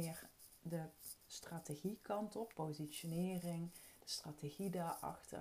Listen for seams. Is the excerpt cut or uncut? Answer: cut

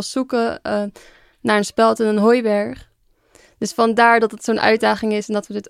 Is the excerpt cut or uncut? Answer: uncut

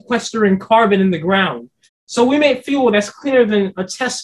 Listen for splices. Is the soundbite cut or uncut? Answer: cut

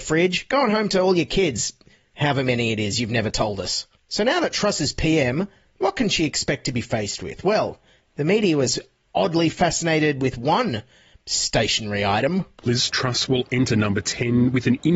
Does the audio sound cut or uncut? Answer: uncut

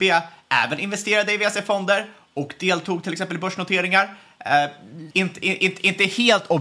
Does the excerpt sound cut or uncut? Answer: cut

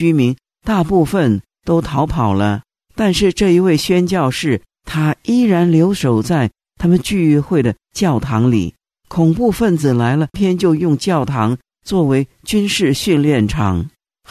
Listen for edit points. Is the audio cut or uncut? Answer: cut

